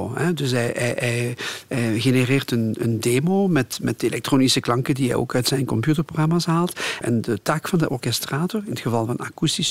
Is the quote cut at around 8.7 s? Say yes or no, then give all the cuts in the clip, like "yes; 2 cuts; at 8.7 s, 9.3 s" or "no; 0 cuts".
no; 1 cut; at 7.0 s